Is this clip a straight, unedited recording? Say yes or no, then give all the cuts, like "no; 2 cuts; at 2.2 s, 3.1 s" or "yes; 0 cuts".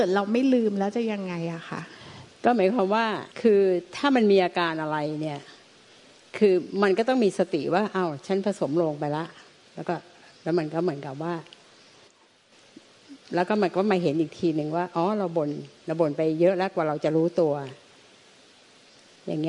no; 1 cut; at 3.3 s